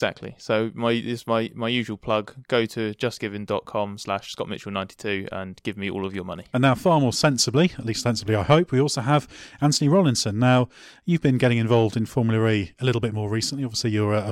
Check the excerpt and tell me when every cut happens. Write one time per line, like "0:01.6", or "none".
none